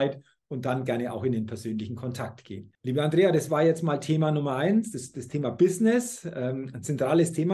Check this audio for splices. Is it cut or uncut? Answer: cut